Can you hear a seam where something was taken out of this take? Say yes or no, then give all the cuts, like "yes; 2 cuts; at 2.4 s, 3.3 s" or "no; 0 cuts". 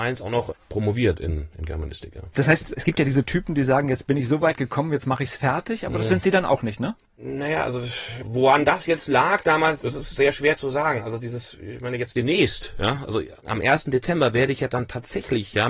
no; 0 cuts